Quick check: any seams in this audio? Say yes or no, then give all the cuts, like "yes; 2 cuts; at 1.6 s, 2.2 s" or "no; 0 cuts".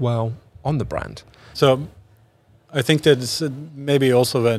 yes; 1 cut; at 1.5 s